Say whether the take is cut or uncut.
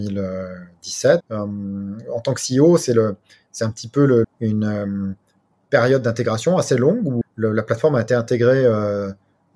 cut